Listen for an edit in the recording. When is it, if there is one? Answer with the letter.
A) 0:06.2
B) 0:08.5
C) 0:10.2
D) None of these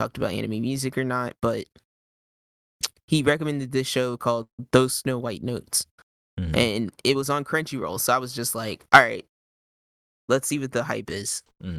D